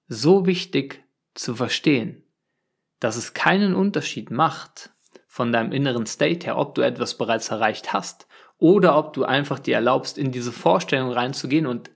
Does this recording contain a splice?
no; 0 cuts

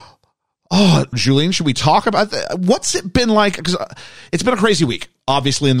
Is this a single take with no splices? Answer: no; 1 cut; at 1.1 s

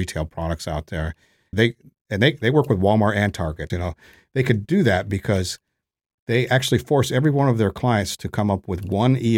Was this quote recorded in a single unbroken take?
no; 2 cuts; at 1.5 s, 3.7 s

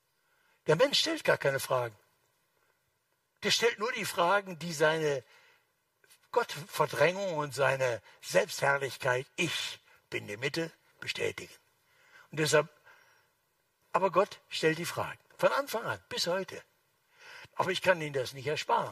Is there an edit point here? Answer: yes; 2 cuts; at 10.9 s, 17.5 s

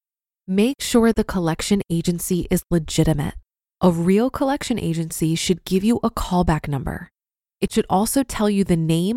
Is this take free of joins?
yes; 0 cuts

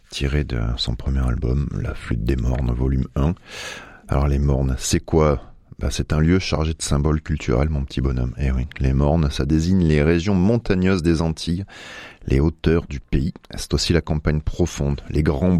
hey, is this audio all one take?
yes; 0 cuts

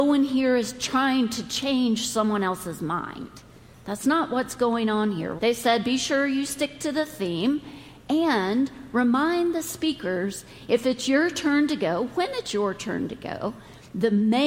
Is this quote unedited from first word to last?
no; 1 cut; at 5.4 s

